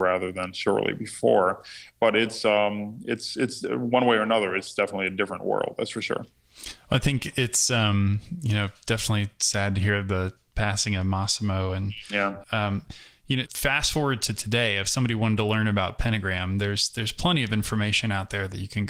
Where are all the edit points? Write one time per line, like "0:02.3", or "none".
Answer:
0:12.4
0:13.5